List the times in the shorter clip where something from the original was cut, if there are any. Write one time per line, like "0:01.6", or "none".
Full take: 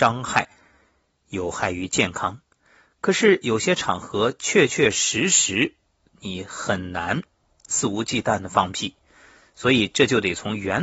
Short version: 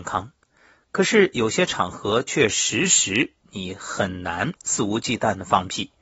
0:02.3
0:03.4
0:04.6